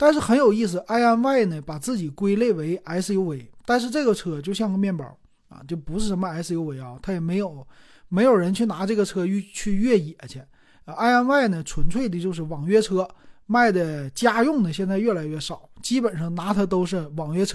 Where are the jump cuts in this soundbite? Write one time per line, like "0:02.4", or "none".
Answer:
none